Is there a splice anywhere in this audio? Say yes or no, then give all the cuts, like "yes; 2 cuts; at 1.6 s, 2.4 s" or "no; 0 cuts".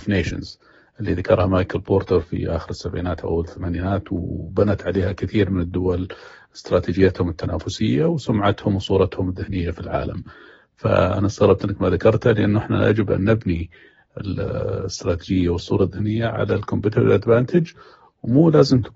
no; 0 cuts